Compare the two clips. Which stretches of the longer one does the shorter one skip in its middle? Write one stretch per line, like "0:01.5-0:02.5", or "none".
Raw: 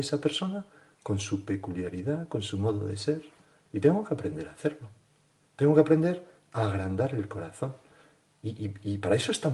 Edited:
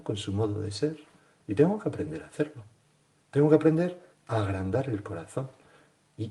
none

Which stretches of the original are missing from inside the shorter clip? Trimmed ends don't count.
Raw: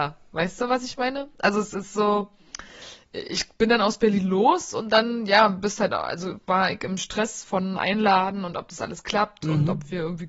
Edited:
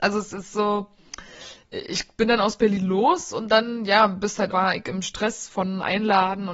0:05.9-0:06.4

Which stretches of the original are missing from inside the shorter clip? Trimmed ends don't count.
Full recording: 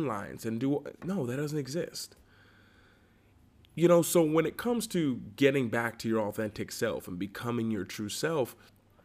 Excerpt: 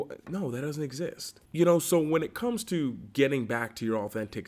0:02.2-0:03.7

